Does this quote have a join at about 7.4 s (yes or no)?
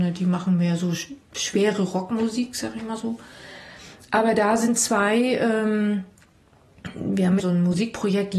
yes